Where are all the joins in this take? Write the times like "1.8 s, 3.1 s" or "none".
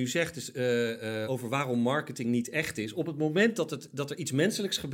1.2 s